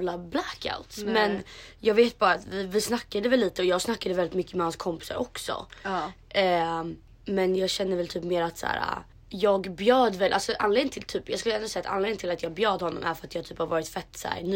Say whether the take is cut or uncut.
uncut